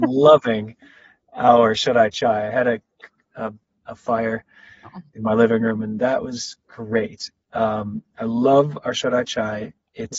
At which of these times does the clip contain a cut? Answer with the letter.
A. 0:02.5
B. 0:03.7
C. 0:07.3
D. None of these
B